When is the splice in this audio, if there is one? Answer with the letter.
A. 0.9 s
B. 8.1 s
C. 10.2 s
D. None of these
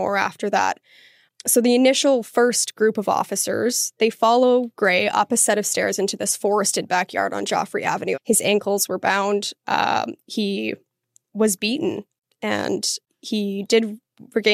B